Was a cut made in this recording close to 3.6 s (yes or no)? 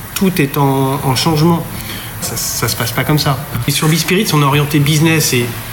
yes